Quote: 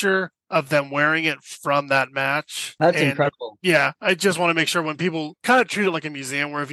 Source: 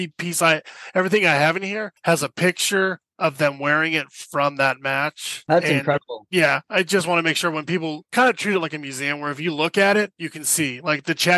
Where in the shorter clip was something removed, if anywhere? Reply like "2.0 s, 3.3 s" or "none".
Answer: none